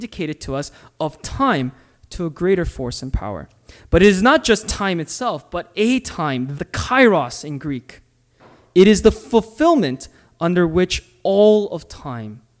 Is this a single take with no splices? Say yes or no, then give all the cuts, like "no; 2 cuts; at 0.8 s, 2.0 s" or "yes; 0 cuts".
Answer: no; 1 cut; at 6.5 s